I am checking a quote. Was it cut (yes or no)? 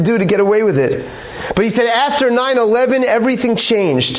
no